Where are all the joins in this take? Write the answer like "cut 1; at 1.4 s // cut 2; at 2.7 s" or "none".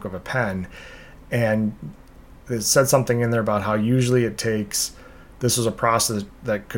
none

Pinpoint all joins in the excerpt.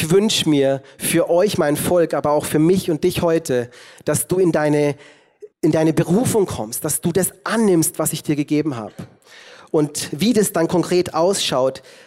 cut 1; at 5.5 s

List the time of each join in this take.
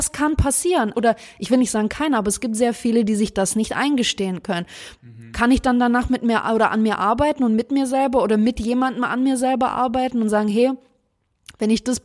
cut 1; at 0.9 s // cut 2; at 5.0 s

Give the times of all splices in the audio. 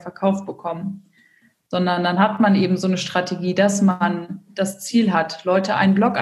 none

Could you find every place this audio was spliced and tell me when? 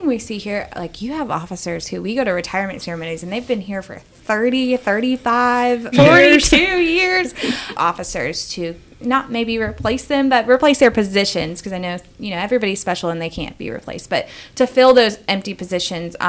cut 1; at 5.9 s // cut 2; at 7.7 s

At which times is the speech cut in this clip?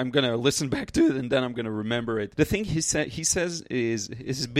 cut 1; at 2.3 s

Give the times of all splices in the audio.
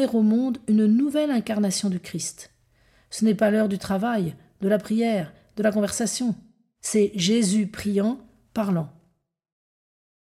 cut 1; at 8.5 s

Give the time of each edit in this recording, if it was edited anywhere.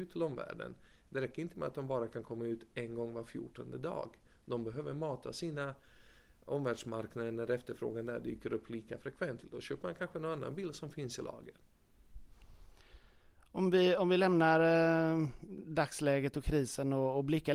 cut 1; at 9.4 s

